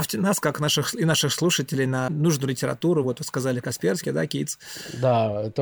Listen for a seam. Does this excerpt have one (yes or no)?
no